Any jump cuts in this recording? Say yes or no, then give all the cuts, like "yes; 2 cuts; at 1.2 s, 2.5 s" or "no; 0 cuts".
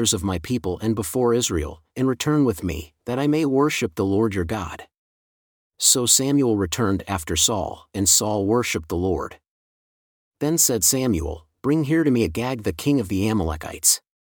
no; 0 cuts